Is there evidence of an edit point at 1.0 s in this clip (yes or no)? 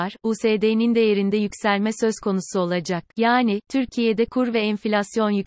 no